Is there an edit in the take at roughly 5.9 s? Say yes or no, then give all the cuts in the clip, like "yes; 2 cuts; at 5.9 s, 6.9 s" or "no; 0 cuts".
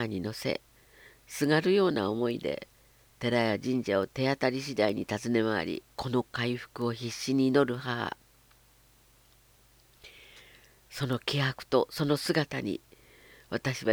yes; 1 cut; at 5.9 s